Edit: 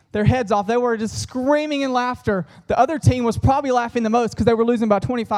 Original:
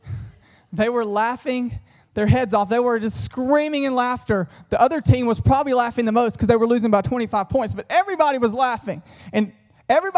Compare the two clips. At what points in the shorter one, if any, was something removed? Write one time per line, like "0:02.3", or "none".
none